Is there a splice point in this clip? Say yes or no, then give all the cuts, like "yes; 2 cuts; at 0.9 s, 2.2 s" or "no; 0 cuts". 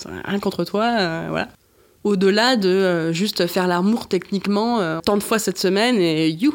yes; 2 cuts; at 2.0 s, 5.0 s